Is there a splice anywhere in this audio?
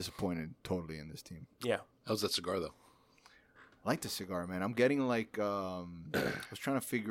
no; 0 cuts

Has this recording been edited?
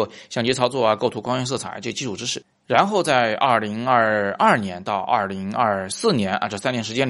no; 0 cuts

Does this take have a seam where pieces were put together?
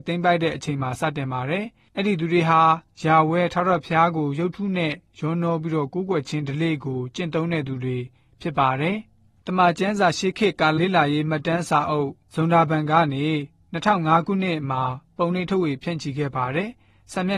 yes; 1 cut; at 10.8 s

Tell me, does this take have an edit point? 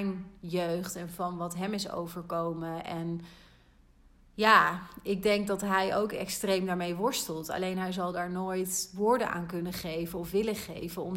no; 0 cuts

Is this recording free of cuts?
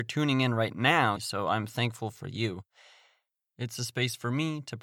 no; 2 cuts; at 1.2 s, 3.4 s

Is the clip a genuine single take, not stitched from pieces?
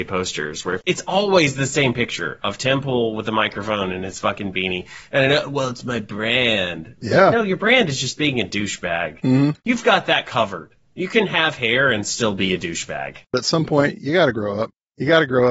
yes; 0 cuts

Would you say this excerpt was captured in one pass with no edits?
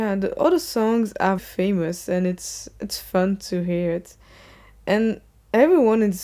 no; 1 cut; at 1.4 s

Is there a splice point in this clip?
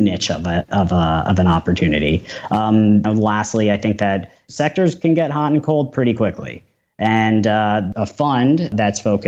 yes; 2 cuts; at 3.0 s, 7.9 s

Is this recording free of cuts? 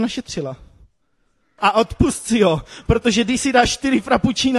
no; 1 cut; at 1.6 s

